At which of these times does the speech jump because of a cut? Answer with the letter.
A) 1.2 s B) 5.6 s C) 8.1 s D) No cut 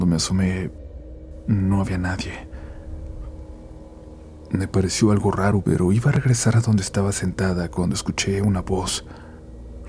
B